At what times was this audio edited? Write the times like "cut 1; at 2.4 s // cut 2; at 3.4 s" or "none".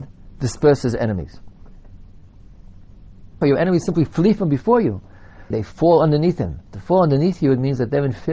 cut 1; at 3.4 s // cut 2; at 5.5 s // cut 3; at 6.6 s